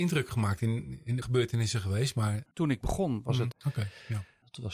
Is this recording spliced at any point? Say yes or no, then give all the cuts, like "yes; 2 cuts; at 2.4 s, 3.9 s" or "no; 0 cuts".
yes; 2 cuts; at 1.2 s, 3.5 s